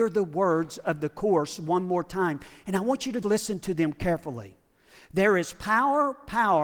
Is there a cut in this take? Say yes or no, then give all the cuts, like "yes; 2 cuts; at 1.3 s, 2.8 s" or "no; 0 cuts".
yes; 1 cut; at 3.2 s